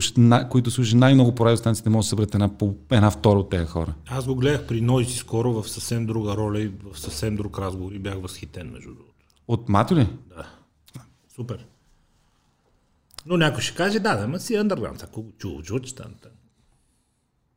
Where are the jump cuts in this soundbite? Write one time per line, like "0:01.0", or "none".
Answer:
0:10.9